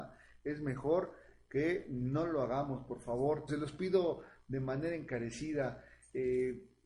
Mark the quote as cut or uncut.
cut